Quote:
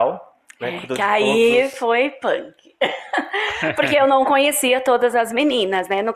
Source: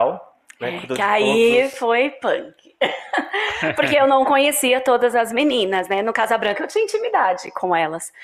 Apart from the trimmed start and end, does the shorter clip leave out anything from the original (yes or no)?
no